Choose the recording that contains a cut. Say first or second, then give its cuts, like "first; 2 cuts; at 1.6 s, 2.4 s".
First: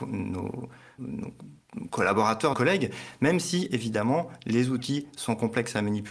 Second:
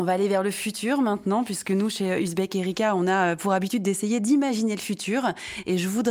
first; 2 cuts; at 1.0 s, 2.5 s